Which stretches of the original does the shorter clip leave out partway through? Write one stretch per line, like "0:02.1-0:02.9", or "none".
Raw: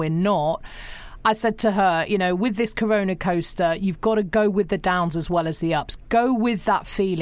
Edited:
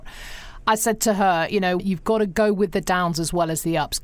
0:02.4-0:03.8